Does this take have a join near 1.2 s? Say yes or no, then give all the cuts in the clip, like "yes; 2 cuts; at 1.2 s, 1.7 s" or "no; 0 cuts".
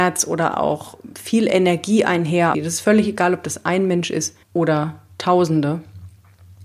no; 2 cuts; at 2.5 s, 4.4 s